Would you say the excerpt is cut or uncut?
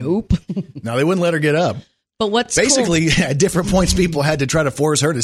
uncut